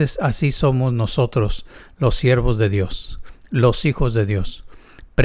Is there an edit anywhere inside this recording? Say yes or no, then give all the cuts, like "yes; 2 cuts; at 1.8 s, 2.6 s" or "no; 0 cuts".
no; 0 cuts